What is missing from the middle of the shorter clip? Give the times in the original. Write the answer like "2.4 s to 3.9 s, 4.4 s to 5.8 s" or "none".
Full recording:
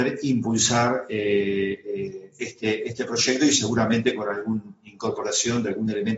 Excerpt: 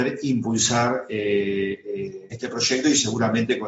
2.3 s to 2.9 s